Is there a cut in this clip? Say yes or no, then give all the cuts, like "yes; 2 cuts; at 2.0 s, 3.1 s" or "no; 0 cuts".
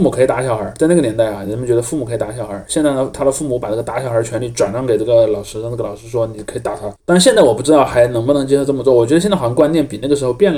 yes; 1 cut; at 7.0 s